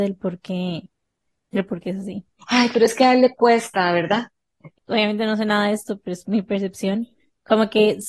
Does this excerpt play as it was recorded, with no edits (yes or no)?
no